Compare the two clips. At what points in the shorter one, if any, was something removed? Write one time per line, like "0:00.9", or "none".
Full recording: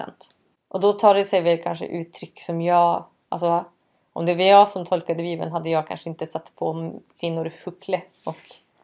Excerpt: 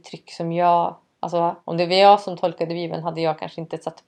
0:01.6